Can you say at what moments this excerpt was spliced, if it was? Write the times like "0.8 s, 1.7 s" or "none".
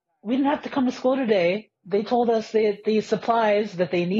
1.8 s